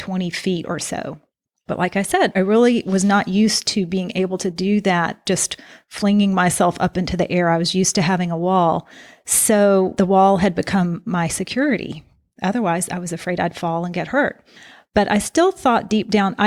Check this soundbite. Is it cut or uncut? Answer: uncut